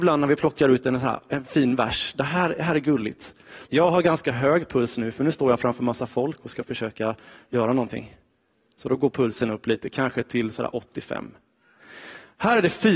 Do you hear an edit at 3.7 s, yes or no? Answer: yes